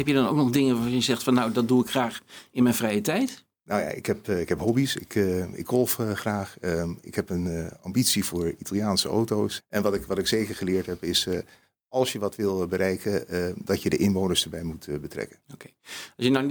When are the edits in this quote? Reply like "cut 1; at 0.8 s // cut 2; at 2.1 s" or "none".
cut 1; at 9.6 s